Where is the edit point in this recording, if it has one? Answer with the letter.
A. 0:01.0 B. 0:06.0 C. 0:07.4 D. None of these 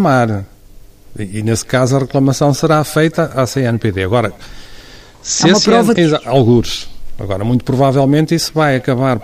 B